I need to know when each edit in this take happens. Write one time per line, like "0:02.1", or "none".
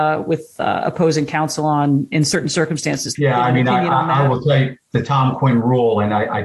0:03.2